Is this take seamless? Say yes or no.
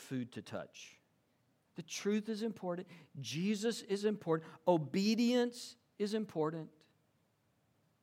no